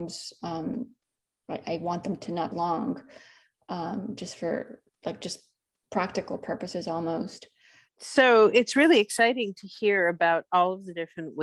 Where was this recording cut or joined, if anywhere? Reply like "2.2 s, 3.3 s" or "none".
2.5 s, 7.9 s